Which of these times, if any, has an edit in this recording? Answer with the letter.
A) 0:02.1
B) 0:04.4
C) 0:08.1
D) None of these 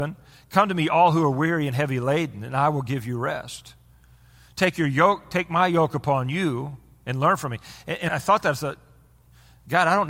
C